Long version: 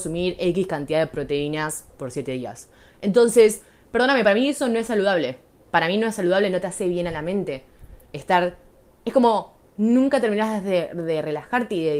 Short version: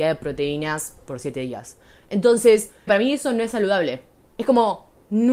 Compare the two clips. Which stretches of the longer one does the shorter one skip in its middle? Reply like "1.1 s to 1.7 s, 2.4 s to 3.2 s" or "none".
3.8 s to 4.2 s, 5.6 s to 8.9 s